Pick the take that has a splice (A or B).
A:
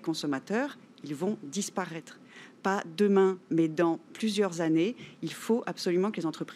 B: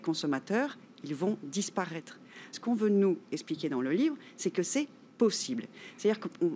B